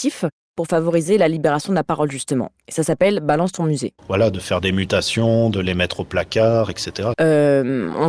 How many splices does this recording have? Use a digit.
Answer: 2